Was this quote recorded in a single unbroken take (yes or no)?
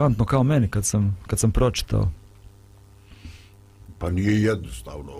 yes